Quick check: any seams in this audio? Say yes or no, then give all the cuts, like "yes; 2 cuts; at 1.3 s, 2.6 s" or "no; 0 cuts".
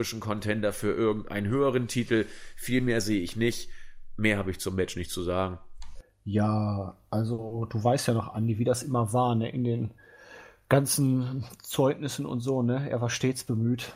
no; 0 cuts